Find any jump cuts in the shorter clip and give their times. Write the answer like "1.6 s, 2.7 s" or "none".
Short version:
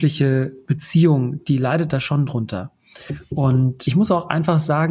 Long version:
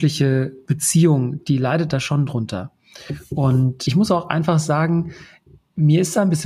none